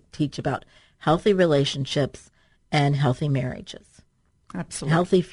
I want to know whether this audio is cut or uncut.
uncut